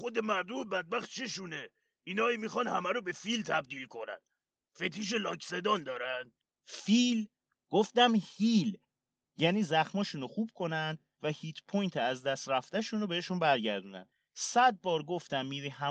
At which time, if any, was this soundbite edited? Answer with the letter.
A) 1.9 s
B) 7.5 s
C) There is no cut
B